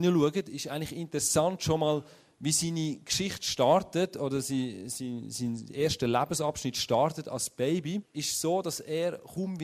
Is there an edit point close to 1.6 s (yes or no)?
no